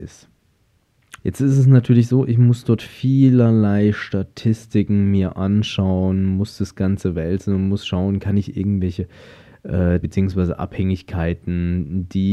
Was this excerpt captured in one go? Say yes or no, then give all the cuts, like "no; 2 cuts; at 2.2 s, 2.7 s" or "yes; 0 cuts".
no; 2 cuts; at 1.2 s, 10.0 s